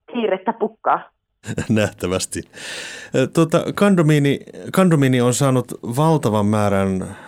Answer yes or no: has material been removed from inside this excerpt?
no